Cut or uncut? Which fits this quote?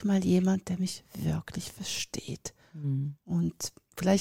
uncut